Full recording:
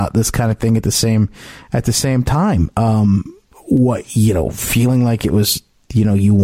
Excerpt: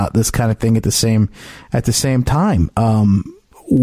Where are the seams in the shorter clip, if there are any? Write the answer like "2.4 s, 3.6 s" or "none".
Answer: none